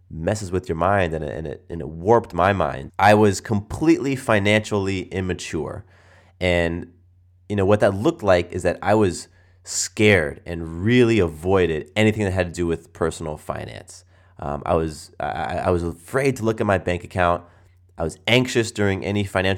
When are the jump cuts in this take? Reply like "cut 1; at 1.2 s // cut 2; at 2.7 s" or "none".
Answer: cut 1; at 2.9 s